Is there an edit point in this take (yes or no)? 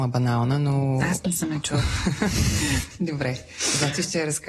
no